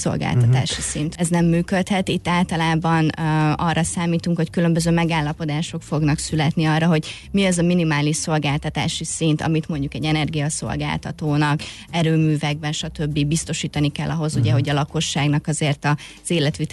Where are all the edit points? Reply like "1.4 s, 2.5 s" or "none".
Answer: 1.2 s